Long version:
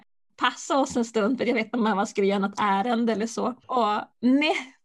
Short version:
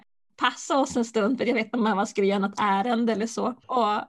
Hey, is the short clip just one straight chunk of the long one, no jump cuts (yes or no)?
yes